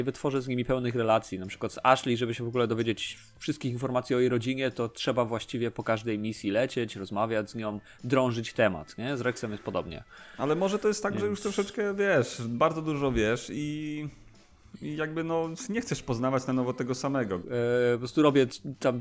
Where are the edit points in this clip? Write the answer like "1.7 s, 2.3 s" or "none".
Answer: 17.4 s